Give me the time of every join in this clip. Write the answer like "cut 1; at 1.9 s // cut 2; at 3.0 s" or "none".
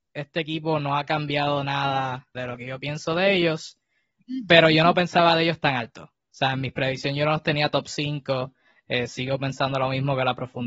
cut 1; at 2.3 s